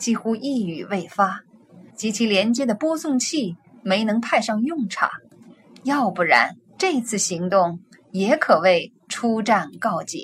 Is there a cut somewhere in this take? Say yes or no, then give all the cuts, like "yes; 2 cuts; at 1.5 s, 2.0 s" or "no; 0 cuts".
yes; 2 cuts; at 1.9 s, 6.8 s